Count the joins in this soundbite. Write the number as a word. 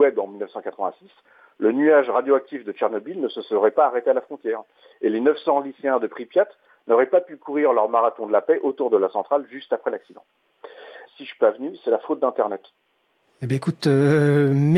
one